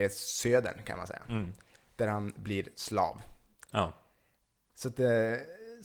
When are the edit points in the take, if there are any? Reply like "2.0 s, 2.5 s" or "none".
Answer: none